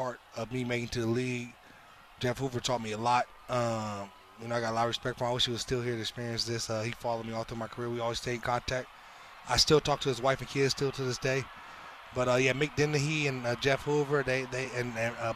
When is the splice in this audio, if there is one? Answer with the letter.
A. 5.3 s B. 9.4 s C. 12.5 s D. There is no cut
D